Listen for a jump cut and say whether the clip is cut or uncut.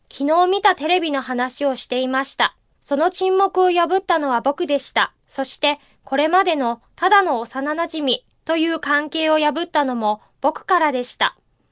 cut